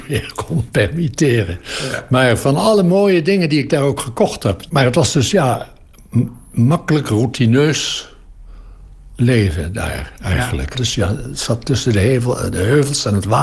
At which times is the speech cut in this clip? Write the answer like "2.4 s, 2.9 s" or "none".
4.7 s, 10.7 s